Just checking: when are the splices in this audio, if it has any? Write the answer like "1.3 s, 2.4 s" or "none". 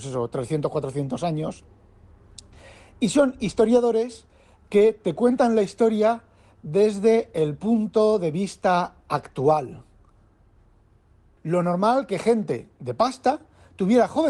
11.4 s